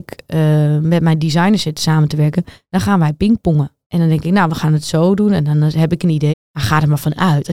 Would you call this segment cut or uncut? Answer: cut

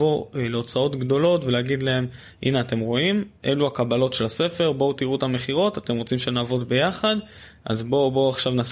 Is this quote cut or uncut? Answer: uncut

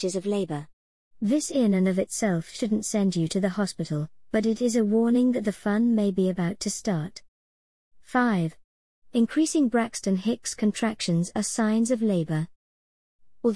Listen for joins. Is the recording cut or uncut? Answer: uncut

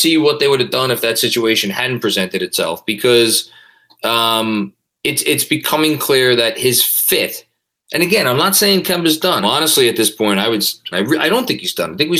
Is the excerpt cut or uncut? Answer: cut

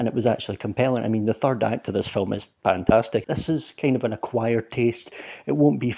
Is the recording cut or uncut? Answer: cut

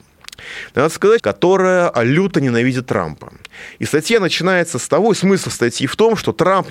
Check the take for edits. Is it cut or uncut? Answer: cut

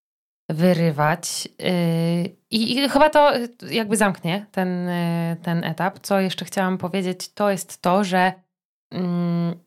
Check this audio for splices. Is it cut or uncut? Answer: uncut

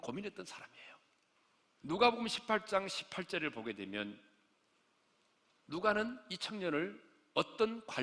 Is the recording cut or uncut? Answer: cut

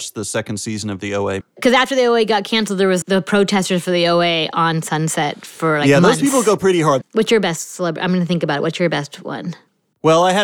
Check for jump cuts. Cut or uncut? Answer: cut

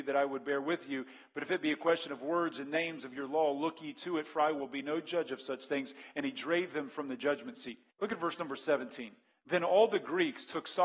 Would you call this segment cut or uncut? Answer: cut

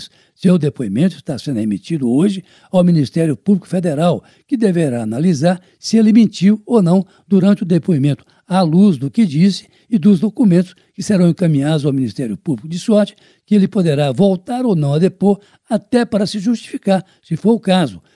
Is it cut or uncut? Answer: uncut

